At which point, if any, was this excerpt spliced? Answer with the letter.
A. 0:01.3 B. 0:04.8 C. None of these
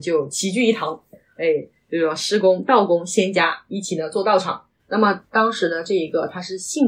B